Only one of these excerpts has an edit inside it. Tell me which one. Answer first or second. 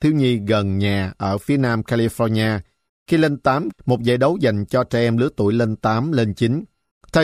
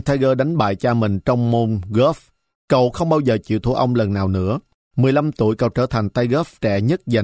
first